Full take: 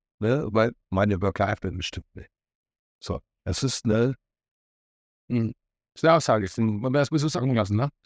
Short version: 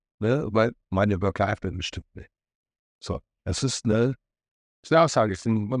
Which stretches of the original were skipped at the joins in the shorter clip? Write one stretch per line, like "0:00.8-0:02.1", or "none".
0:04.8-0:05.9